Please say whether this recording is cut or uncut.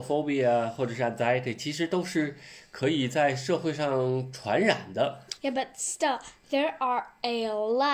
cut